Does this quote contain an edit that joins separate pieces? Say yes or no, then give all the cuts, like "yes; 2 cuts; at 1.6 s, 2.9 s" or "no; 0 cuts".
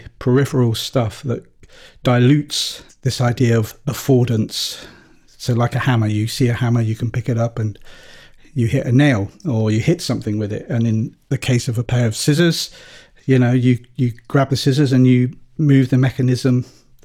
yes; 1 cut; at 2.9 s